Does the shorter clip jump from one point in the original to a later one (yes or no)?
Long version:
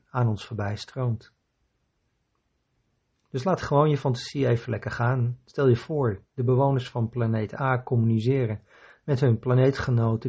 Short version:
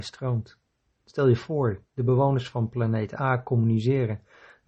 yes